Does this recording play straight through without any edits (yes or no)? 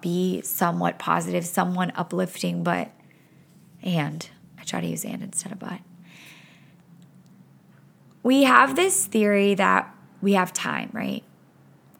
yes